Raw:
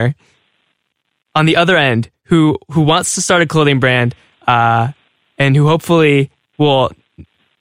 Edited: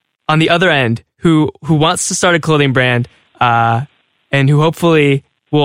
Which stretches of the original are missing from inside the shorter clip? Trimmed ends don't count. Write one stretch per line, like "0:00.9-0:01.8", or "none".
none